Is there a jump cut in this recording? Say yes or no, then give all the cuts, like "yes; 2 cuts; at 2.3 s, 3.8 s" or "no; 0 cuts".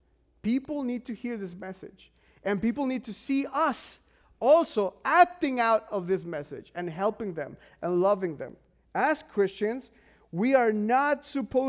no; 0 cuts